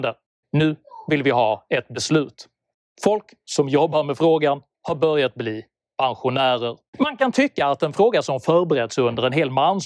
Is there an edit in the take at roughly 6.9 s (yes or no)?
yes